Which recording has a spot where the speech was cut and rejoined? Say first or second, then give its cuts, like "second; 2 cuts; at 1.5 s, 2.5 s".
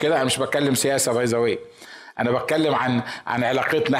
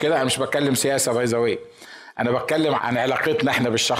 second; 1 cut; at 2.8 s